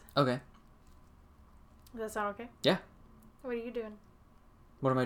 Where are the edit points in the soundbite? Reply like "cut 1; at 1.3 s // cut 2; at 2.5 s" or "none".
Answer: cut 1; at 3.3 s